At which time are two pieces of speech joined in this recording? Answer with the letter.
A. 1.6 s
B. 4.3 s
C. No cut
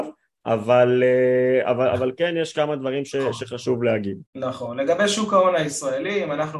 B